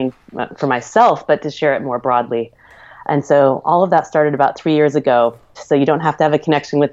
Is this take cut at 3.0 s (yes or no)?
no